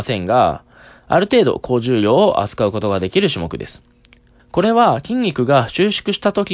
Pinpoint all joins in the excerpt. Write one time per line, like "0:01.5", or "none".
0:04.4